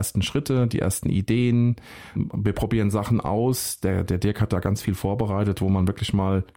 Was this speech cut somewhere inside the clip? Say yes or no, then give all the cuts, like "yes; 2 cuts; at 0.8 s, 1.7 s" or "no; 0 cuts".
no; 0 cuts